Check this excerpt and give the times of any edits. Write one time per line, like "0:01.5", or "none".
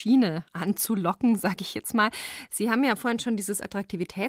none